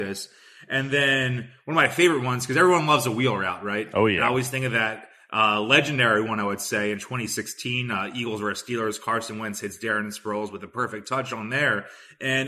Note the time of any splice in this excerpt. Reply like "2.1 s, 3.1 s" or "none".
none